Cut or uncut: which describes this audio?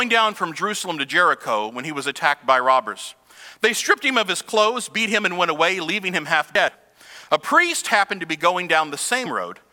uncut